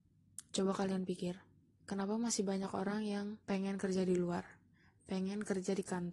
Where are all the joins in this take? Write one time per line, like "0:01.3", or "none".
0:03.4